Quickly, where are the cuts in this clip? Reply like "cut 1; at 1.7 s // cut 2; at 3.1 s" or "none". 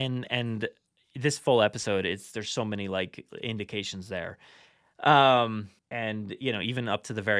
cut 1; at 5.8 s